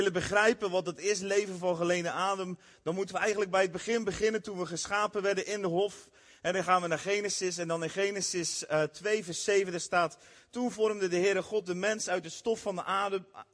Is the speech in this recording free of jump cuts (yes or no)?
yes